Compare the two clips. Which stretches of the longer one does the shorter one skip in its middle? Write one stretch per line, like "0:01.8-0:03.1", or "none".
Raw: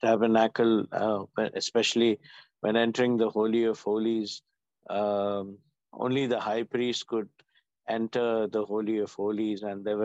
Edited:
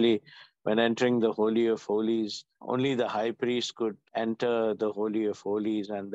0:04.5-0:05.9
0:07.4-0:07.8